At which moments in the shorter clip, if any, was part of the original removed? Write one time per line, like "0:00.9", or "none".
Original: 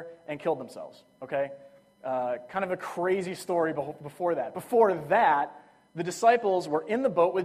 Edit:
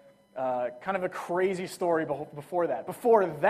none